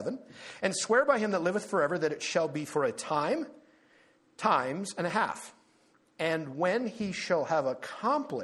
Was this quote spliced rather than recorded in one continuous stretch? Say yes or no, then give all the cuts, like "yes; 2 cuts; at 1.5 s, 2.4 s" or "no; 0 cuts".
no; 0 cuts